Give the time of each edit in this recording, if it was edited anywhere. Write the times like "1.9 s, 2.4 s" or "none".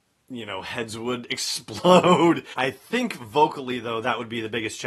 2.5 s